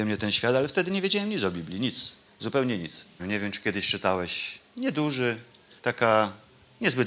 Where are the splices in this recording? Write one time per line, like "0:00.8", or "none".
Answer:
0:03.2
0:05.8